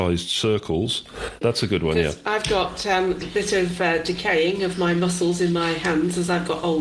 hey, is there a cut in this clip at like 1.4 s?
yes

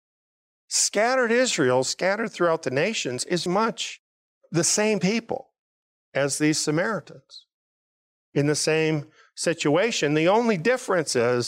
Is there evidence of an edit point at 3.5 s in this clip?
yes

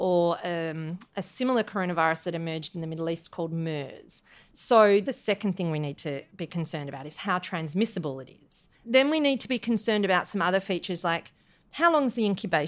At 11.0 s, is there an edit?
no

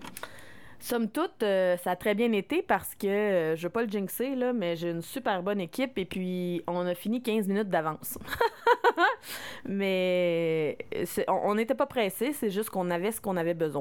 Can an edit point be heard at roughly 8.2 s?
no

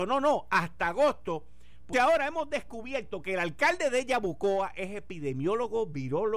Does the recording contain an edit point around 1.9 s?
yes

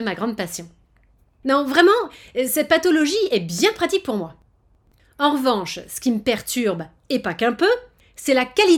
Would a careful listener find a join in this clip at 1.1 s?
no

